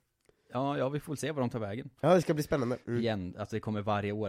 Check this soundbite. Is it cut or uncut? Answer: cut